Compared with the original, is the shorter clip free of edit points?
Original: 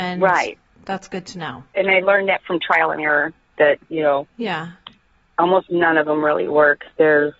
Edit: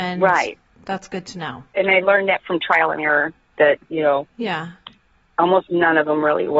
yes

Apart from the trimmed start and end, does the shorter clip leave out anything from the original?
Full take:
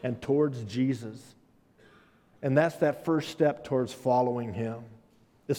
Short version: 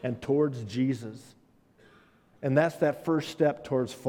no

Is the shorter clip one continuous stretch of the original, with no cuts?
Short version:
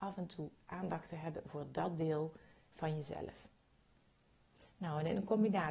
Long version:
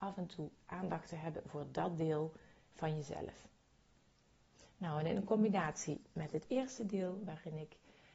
yes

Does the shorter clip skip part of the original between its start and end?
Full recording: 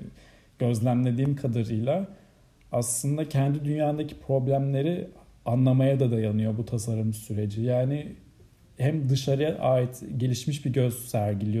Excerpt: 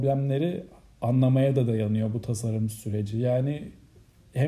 no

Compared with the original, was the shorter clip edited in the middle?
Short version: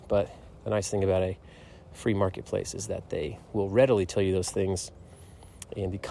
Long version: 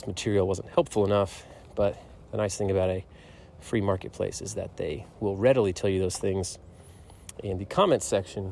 no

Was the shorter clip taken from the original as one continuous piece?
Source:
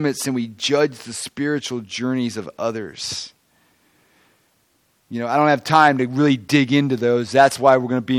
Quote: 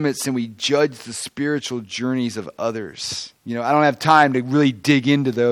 no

